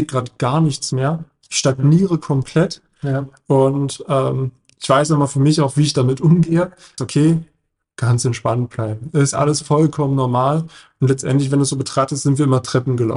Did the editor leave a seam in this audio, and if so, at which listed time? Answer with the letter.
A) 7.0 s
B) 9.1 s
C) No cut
A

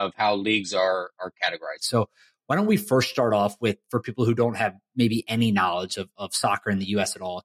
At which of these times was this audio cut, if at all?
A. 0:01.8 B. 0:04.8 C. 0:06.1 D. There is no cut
A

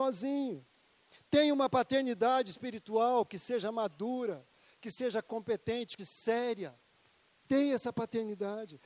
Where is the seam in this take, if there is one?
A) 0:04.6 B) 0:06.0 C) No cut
B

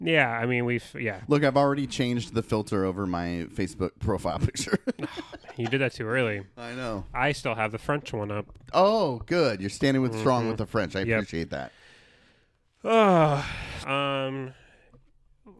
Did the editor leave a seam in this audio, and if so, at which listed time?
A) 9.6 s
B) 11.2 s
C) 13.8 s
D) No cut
C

